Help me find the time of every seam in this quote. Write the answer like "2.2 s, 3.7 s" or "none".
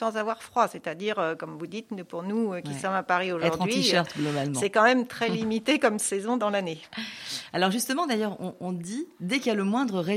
none